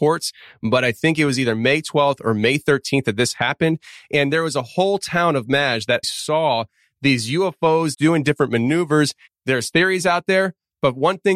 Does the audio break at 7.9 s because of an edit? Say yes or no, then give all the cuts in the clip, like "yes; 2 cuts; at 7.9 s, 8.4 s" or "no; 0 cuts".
yes; 3 cuts; at 6.0 s, 7.9 s, 9.3 s